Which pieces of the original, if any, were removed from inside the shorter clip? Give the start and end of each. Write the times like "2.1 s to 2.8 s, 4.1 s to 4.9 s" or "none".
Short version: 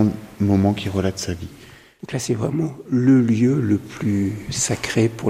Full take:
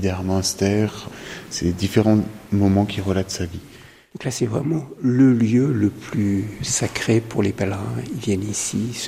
none